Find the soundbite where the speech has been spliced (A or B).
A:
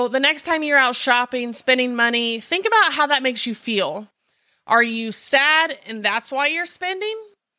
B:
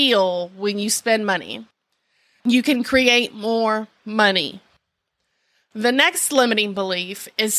B